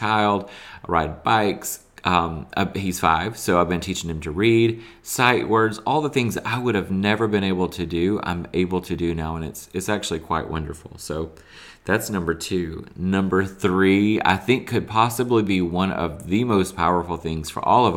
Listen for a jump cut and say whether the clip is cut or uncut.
uncut